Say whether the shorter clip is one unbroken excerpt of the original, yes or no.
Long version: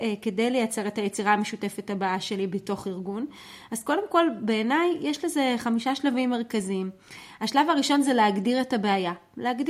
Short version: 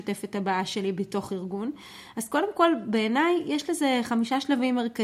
yes